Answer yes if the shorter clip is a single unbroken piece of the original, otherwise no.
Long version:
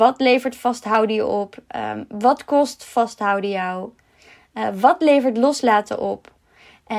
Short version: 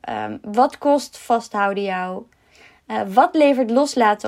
yes